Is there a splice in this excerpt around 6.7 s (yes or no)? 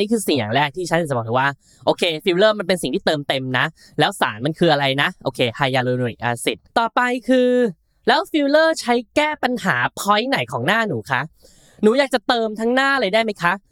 yes